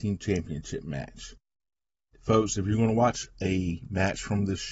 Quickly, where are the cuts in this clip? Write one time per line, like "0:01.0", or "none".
none

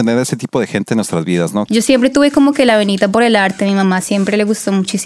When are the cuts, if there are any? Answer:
0:01.7

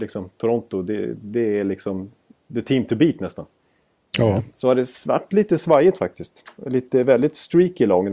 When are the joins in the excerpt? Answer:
none

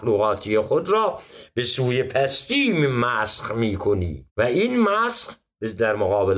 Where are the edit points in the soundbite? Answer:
0:04.3

